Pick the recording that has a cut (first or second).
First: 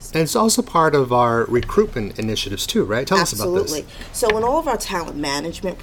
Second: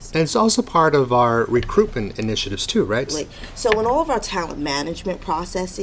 second